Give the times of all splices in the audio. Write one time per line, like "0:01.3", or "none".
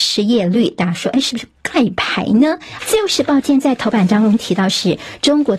0:02.8